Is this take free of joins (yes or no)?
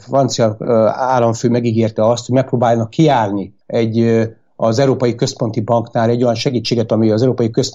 no